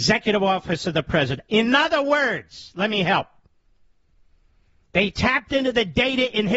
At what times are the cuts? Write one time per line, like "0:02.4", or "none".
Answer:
none